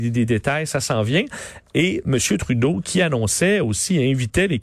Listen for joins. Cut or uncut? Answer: uncut